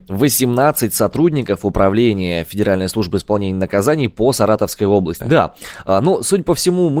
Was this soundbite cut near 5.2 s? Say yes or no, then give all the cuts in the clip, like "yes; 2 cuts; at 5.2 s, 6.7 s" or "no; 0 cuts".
yes; 1 cut; at 5.2 s